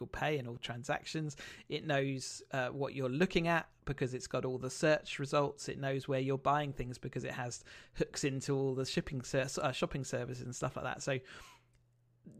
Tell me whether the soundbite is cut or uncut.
uncut